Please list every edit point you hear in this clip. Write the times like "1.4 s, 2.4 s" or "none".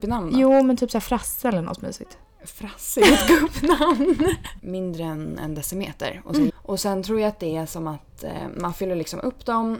4.6 s, 6.5 s